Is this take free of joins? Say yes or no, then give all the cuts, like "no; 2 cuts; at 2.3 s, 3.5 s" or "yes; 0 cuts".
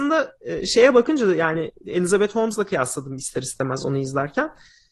yes; 0 cuts